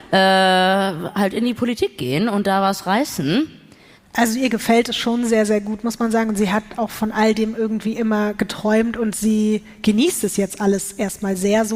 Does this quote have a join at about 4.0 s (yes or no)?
yes